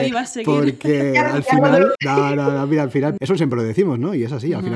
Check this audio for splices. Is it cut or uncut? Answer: cut